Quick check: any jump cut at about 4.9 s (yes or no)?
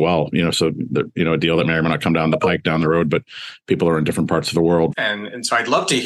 yes